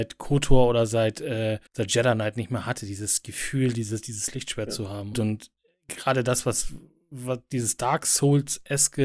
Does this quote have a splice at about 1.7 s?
yes; 2 cuts; at 1.7 s, 5.1 s

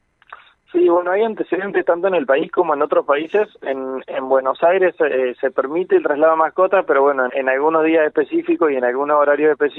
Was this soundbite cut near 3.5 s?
no; 1 cut; at 7.3 s

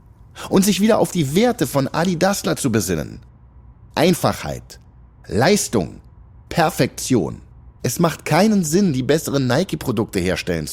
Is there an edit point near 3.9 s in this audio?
no; 1 cut; at 7.8 s

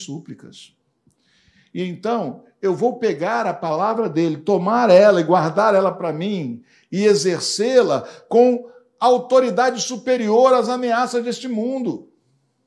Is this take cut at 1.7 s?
no; 0 cuts

